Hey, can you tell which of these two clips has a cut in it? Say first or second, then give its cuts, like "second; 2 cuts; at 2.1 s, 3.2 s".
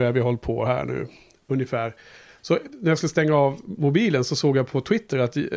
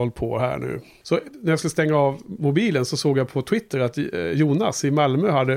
second; 1 cut; at 1.0 s